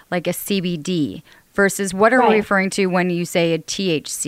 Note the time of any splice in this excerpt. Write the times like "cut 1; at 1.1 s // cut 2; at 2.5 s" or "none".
none